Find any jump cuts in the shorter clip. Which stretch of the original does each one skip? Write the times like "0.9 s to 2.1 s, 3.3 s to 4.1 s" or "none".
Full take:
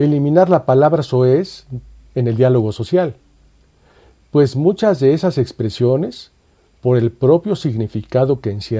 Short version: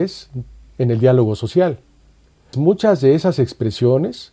3.9 s to 4.5 s